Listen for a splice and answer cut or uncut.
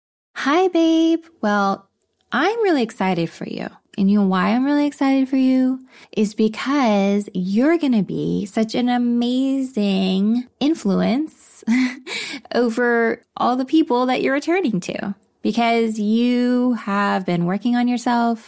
uncut